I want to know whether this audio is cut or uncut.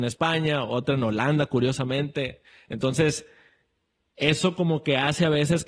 uncut